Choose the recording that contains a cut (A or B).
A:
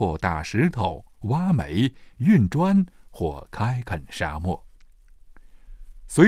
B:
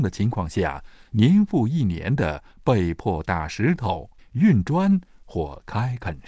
B